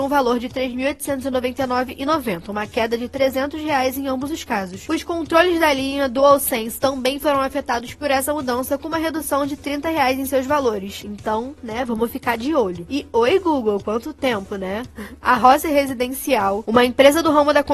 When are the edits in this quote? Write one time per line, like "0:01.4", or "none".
0:11.0

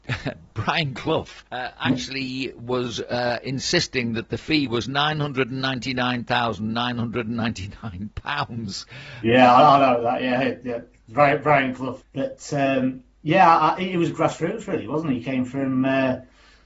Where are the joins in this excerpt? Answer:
0:01.5
0:12.0

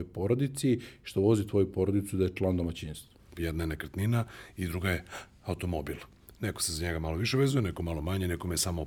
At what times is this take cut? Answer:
0:03.3

